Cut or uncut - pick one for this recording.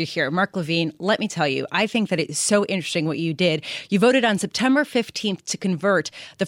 uncut